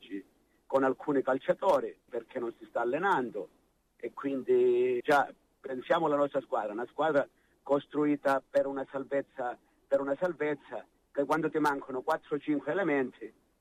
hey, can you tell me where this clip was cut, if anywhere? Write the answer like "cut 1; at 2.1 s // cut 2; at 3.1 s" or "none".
cut 1; at 2.1 s // cut 2; at 5.0 s